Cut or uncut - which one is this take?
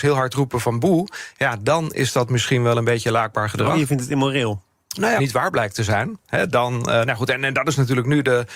cut